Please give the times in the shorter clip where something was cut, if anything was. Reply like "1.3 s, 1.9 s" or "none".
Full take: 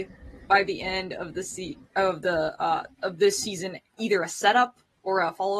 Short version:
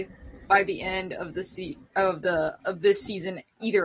2.6 s

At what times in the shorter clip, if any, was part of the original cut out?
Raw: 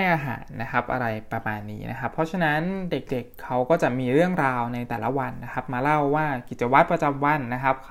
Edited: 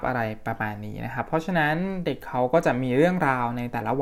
2.2 s

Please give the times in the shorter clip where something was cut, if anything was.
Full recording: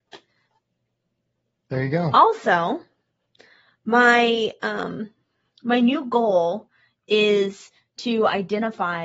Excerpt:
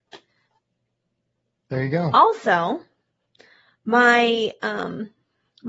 none

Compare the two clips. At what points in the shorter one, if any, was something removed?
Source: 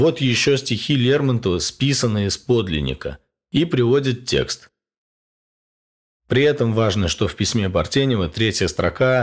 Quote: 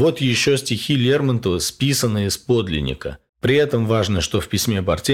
3.3 s

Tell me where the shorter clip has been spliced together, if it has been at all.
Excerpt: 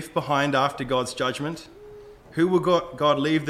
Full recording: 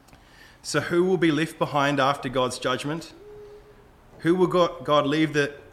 2.2 s

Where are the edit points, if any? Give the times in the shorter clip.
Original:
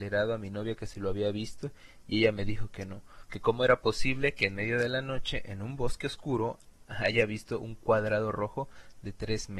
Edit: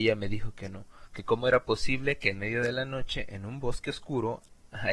none

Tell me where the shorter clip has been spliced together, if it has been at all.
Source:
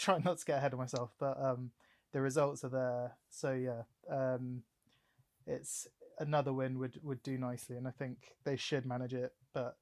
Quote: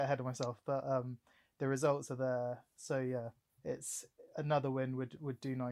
3.5 s

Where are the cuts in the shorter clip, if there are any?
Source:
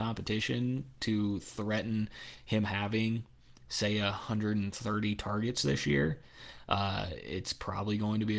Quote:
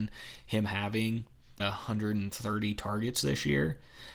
1.6 s

